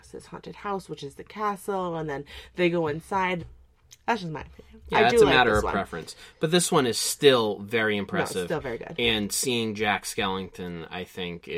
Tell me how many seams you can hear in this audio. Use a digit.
1